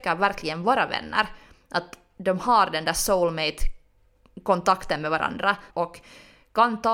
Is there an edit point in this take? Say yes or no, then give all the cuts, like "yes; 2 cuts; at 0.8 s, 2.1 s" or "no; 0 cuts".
yes; 1 cut; at 5.7 s